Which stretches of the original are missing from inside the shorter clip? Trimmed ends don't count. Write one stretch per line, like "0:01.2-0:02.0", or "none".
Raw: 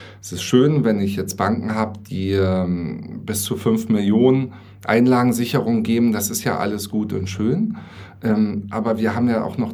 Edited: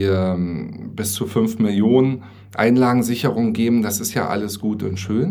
none

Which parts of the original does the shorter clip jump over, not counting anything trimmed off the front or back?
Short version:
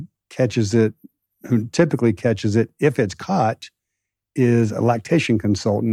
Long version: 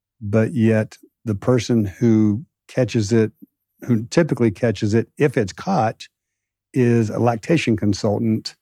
none

